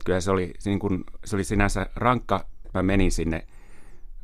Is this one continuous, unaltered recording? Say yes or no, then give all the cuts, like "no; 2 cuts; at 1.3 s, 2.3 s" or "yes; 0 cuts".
no; 1 cut; at 2.6 s